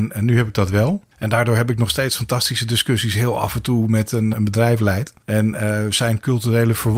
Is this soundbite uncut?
no; 2 cuts; at 1.1 s, 4.3 s

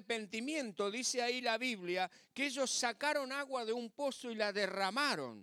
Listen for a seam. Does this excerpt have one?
no; 0 cuts

